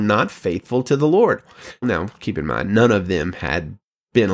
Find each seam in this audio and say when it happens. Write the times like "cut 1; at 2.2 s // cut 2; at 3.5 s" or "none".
cut 1; at 1.8 s